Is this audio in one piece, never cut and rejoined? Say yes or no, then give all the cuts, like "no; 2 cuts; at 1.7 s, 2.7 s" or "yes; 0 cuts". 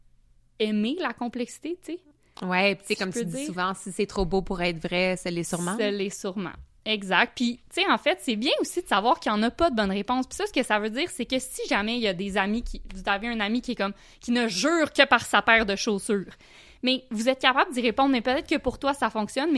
yes; 0 cuts